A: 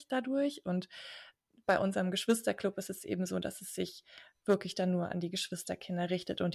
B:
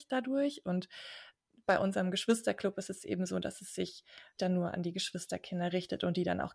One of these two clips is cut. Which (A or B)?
B